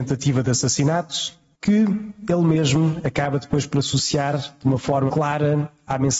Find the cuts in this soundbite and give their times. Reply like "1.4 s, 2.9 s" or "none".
1.5 s, 5.1 s